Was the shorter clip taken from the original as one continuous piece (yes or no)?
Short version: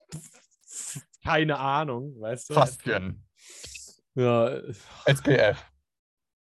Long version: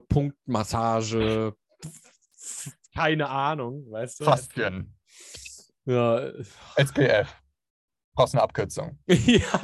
yes